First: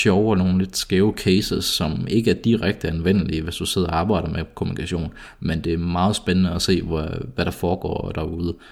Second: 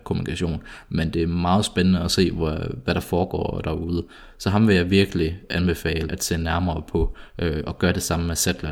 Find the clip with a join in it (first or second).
second